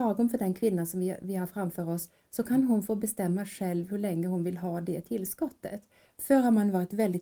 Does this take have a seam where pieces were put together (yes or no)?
no